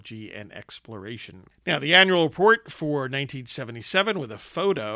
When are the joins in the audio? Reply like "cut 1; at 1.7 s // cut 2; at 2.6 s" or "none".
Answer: cut 1; at 1.5 s